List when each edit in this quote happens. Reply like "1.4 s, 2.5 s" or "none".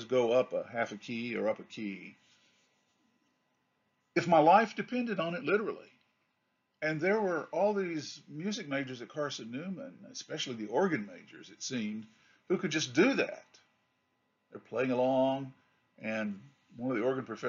none